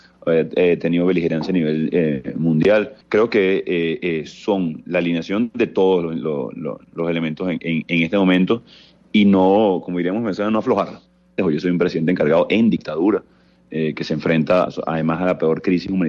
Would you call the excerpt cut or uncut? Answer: cut